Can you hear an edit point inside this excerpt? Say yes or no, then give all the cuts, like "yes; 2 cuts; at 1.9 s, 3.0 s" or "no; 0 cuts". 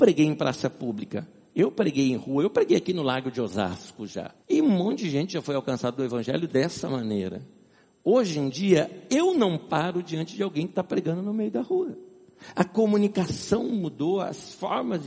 yes; 1 cut; at 4.4 s